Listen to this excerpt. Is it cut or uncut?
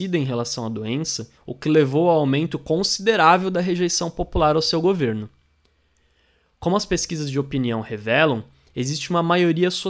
cut